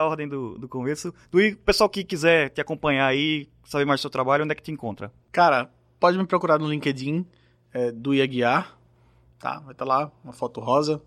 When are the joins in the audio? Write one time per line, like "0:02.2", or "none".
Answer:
none